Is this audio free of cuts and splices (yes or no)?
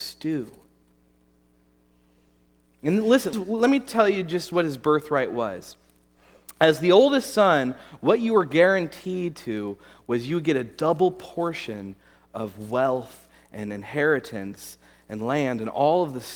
no